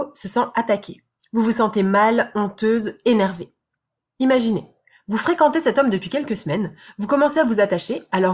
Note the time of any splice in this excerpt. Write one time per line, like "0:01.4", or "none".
0:01.2
0:04.1